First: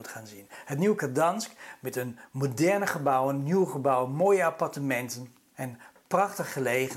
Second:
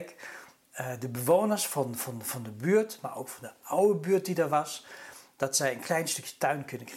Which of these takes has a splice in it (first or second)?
first